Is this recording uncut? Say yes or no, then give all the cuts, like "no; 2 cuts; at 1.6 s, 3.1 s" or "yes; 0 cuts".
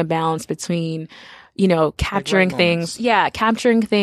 yes; 0 cuts